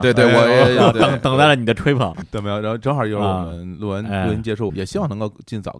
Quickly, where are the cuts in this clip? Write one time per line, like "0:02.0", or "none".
0:02.2
0:04.7